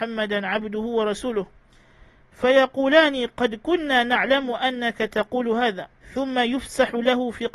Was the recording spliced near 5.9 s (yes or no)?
yes